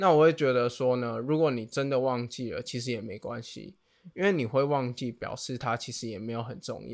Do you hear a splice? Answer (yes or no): no